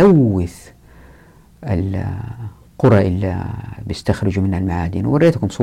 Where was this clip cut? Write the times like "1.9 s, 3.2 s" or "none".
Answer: none